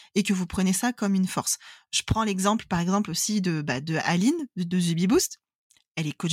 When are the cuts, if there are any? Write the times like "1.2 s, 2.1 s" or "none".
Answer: none